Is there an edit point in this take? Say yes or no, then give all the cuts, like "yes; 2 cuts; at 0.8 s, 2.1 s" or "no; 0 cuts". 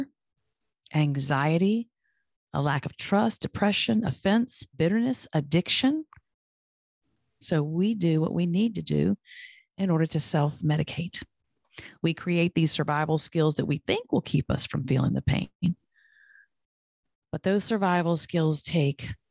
yes; 2 cuts; at 4.7 s, 7.4 s